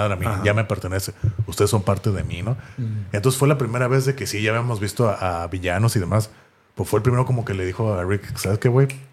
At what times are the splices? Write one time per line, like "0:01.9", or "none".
none